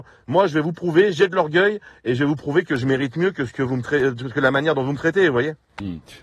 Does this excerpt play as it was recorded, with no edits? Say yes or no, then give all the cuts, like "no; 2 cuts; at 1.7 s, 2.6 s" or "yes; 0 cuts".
yes; 0 cuts